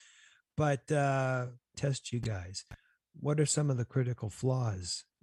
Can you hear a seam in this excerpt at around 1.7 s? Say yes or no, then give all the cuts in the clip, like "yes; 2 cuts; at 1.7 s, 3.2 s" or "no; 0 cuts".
yes; 1 cut; at 1.7 s